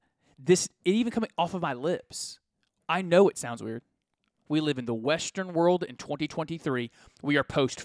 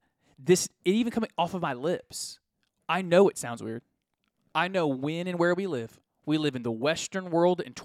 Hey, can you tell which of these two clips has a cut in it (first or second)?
first